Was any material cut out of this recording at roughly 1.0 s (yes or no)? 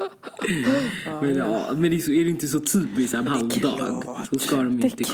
no